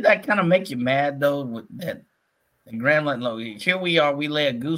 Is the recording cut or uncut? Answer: cut